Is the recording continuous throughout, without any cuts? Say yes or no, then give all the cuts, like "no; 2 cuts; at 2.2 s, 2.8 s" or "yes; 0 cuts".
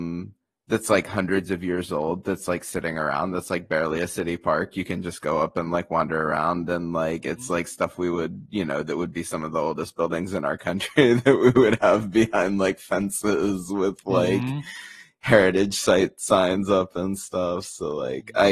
yes; 0 cuts